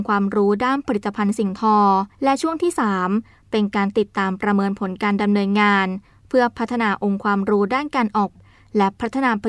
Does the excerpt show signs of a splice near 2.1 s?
yes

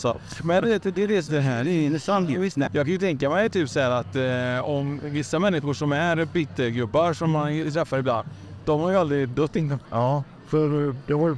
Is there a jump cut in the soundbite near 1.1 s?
no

